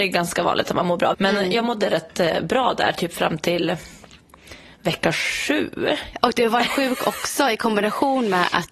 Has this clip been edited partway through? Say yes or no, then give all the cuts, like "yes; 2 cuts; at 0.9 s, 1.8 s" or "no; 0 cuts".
yes; 2 cuts; at 1.1 s, 6.1 s